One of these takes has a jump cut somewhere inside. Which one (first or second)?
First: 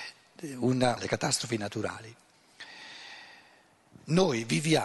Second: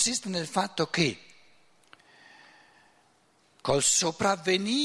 first